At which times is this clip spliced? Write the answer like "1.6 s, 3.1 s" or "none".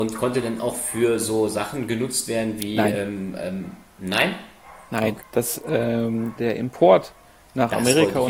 5.2 s, 6.4 s